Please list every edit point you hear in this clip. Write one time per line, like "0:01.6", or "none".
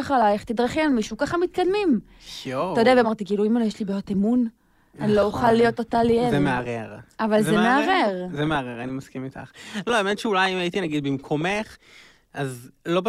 0:03.0

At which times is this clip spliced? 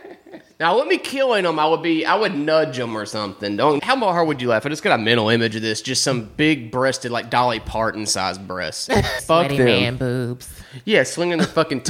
0:03.8
0:09.2

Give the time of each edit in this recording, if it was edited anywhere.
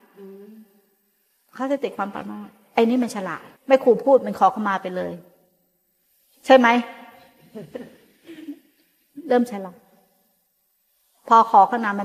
0:03.6

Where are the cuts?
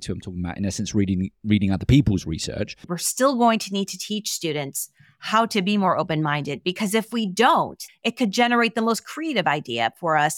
0:02.8
0:07.9

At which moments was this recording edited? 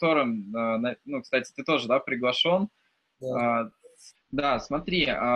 0:04.1

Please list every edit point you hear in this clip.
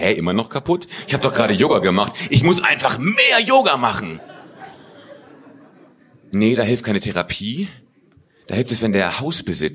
none

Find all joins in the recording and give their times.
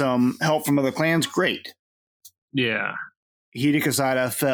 0:02.4

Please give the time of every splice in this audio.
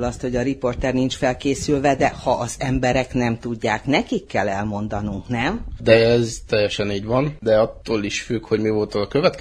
none

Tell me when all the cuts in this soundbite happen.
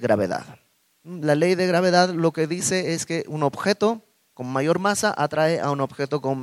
none

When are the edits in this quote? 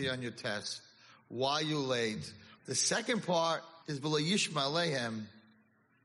0:02.6
0:03.8

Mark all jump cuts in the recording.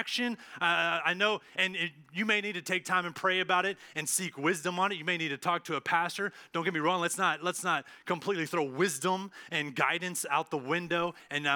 none

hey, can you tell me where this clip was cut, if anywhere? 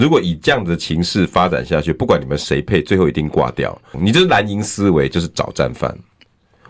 0:03.9

